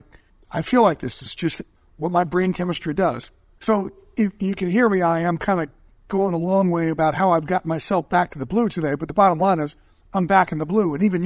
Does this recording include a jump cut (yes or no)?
no